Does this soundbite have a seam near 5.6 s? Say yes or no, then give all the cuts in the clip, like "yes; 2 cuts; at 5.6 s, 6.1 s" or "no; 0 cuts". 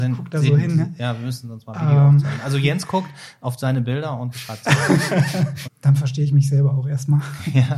yes; 1 cut; at 5.6 s